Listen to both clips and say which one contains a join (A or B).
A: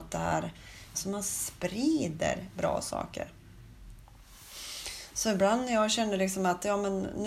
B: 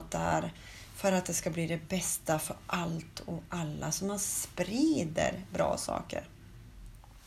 A